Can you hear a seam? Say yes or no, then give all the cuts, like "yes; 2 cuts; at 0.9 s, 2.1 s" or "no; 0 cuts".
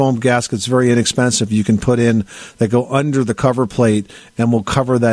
no; 0 cuts